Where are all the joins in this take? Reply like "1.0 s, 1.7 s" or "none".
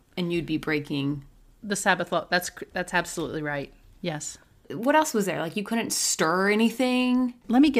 none

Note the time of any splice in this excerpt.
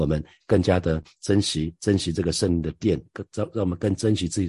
none

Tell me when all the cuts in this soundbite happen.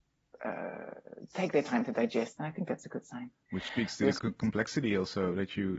2.4 s, 4.2 s

